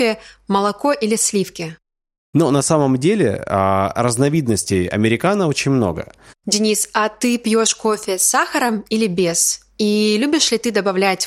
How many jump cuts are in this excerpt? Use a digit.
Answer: 2